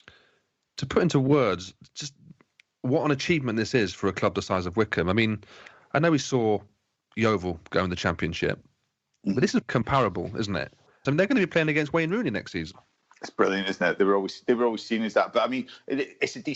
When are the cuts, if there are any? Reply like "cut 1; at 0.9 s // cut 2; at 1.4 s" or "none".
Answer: cut 1; at 9.6 s // cut 2; at 11.0 s